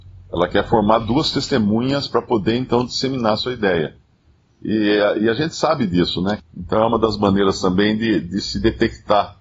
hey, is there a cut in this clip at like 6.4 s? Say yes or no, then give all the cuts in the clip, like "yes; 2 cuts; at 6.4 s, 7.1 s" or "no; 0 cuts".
yes; 1 cut; at 6.4 s